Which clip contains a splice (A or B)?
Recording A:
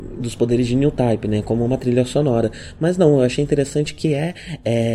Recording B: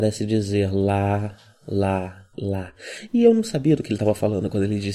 B